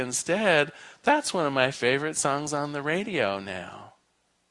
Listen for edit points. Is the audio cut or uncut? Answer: uncut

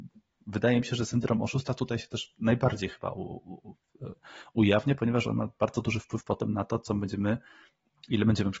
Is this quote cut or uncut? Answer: uncut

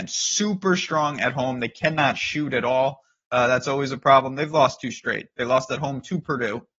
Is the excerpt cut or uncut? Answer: uncut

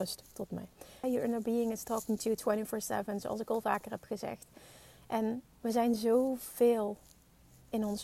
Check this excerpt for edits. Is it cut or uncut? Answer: cut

